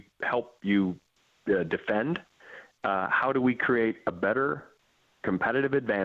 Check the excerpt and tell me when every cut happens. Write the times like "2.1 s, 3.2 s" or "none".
none